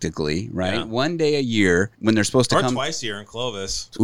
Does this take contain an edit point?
yes; 1 cut; at 1.9 s

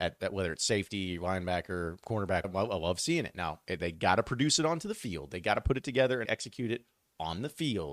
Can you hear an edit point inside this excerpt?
yes; 2 cuts; at 2.4 s, 6.3 s

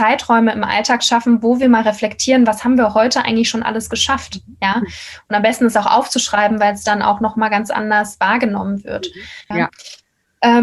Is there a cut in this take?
yes; 1 cut; at 9.5 s

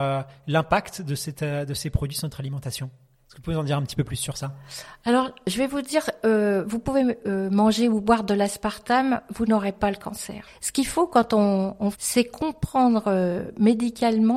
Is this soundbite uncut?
no; 2 cuts; at 10.5 s, 11.9 s

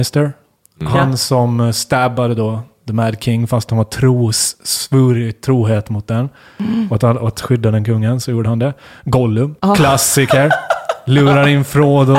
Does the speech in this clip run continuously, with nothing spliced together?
no; 1 cut; at 9.6 s

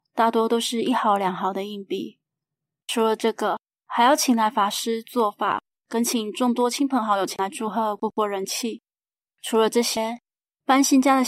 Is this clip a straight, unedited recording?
no; 1 cut; at 9.3 s

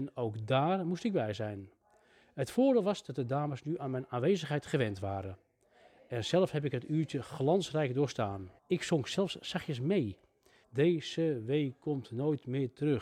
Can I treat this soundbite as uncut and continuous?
no; 2 cuts; at 8.6 s, 10.6 s

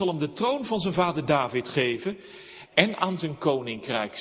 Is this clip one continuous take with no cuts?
no; 1 cut; at 2.7 s

